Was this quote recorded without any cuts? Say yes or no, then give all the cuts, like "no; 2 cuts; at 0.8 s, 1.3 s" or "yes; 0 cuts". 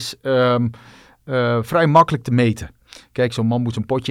yes; 0 cuts